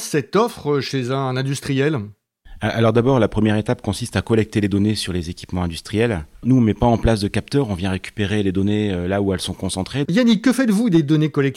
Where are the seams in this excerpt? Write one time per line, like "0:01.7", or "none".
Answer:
0:10.1